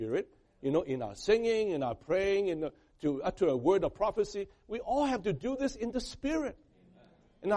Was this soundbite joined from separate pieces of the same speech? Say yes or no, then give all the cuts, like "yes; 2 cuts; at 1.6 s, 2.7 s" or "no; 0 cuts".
no; 0 cuts